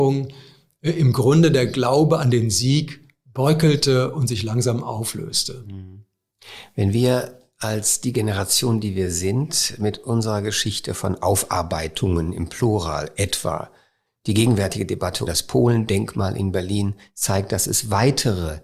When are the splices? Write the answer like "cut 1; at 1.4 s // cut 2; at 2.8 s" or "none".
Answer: cut 1; at 14.1 s // cut 2; at 15.3 s